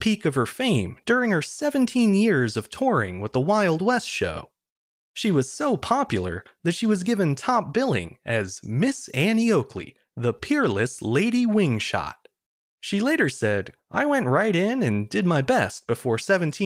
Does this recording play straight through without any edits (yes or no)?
no